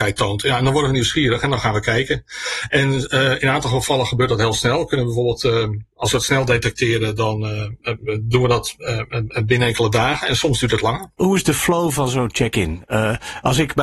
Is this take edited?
no; 0 cuts

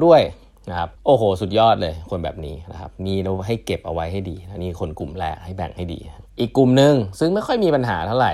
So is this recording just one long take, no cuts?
no; 2 cuts; at 0.9 s, 6.3 s

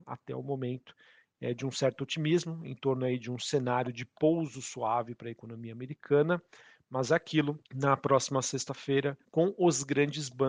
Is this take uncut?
no; 2 cuts; at 7.6 s, 9.2 s

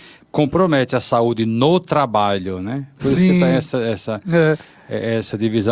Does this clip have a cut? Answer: no; 0 cuts

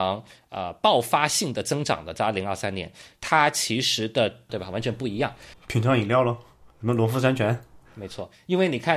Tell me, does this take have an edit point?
yes; 2 cuts; at 4.5 s, 5.5 s

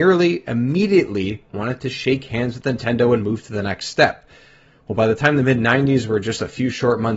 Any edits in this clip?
no; 0 cuts

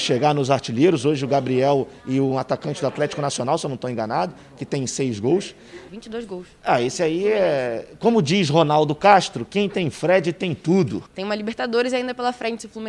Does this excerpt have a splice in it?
yes; 2 cuts; at 5.9 s, 11.1 s

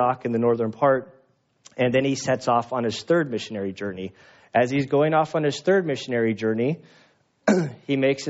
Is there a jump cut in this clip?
no; 0 cuts

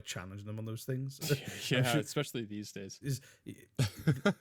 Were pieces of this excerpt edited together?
yes; 2 cuts; at 1.2 s, 3.0 s

